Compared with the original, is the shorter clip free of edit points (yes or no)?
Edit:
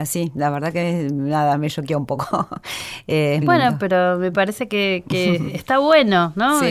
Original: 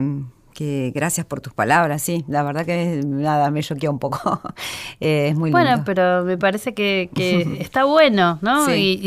no